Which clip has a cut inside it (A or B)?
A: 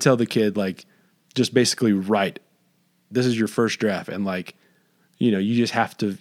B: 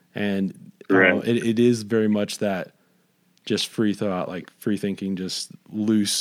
A